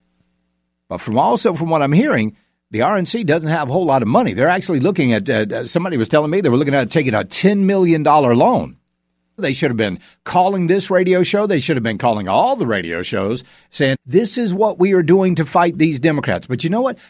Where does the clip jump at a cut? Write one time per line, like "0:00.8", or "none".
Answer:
0:09.4
0:13.9